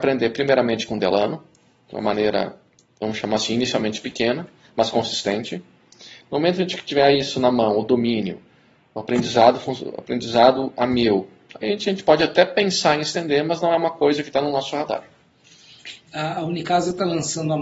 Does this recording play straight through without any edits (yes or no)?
yes